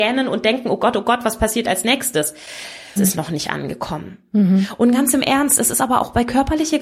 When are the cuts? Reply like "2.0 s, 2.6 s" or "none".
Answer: 3.0 s